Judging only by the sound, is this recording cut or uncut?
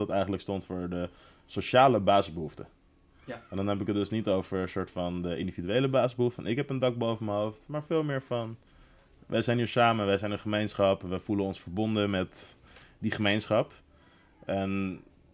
uncut